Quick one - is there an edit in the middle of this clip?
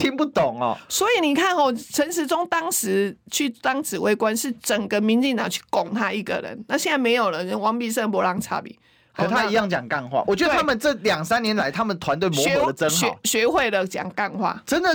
no; 0 cuts

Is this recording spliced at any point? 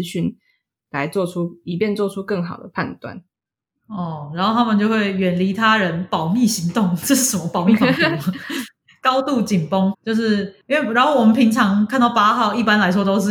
yes; 1 cut; at 9.9 s

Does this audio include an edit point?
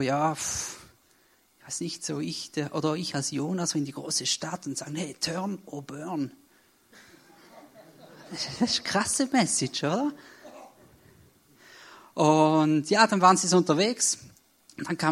no; 0 cuts

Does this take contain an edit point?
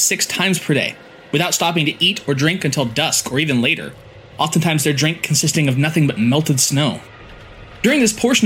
no; 0 cuts

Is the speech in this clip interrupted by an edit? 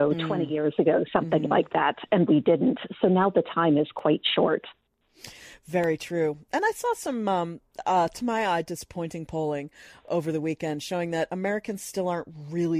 no; 0 cuts

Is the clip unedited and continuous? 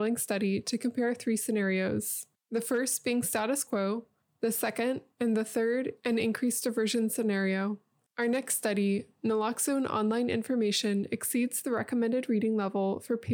no; 2 cuts; at 5.1 s, 8.1 s

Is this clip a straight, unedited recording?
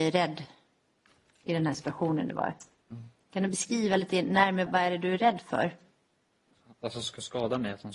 no; 1 cut; at 4.7 s

